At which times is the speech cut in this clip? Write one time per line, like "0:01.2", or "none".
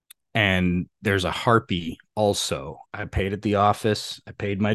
0:02.9